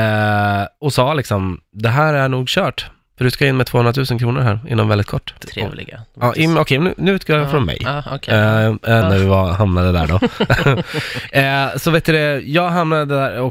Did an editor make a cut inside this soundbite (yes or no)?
yes